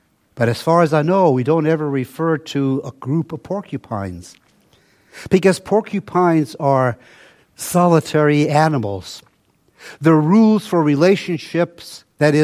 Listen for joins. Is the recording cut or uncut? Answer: uncut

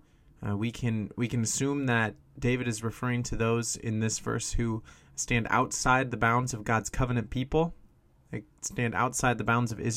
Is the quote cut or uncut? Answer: uncut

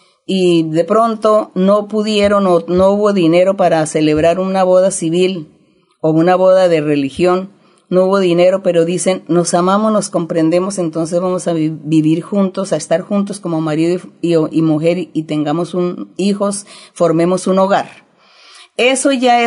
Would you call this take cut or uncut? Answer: uncut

